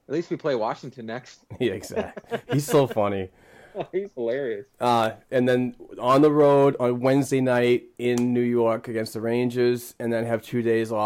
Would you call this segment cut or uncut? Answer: uncut